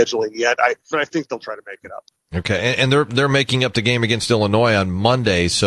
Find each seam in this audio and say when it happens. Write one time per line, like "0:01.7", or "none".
0:00.9

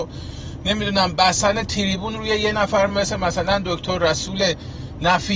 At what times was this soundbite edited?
none

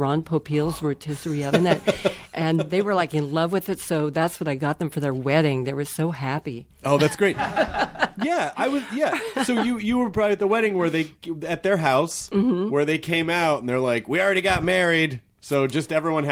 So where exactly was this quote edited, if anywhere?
none

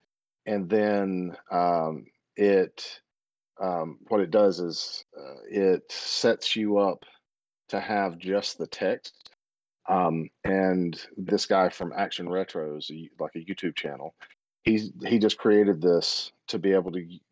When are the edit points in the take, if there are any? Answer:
0:09.8
0:11.3

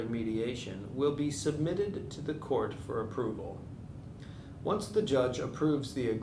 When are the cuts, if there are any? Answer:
none

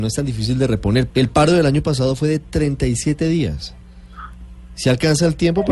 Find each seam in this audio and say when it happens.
0:01.1

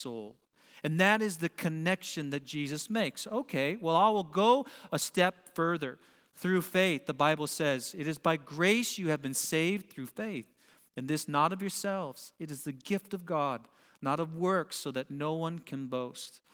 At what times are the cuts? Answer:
none

